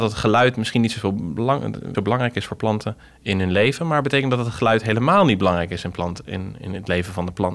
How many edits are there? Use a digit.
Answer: 1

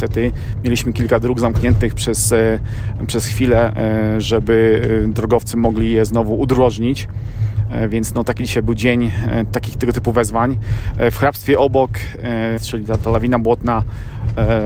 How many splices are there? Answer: 1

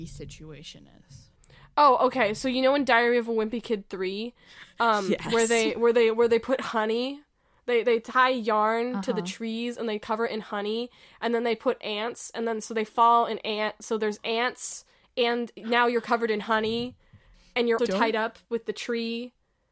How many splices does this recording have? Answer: 1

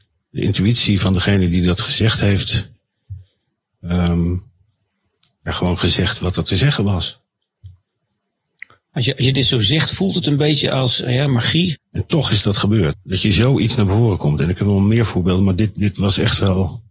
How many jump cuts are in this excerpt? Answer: 2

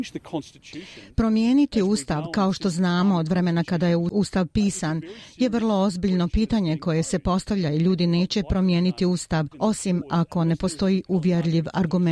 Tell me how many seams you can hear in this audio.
1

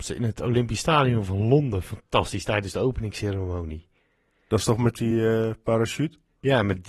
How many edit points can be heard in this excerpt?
0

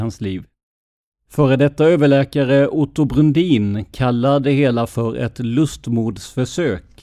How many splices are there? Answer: 1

